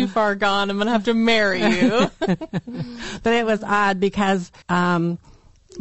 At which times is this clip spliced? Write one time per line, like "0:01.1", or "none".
0:04.6